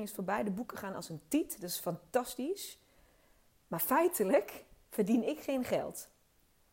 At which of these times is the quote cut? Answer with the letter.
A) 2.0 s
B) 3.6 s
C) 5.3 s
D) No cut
D